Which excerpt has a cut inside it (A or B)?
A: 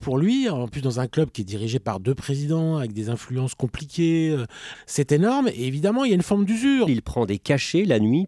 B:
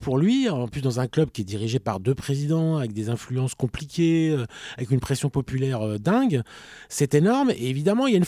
A